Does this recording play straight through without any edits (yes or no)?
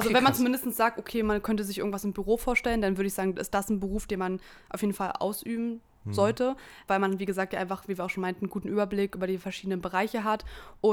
yes